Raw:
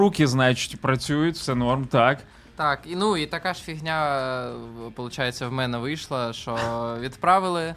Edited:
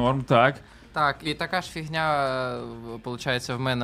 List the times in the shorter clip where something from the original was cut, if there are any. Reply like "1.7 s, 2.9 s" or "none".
1.2 s